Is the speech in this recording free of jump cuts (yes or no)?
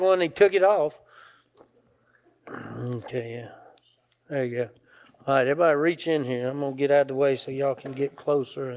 yes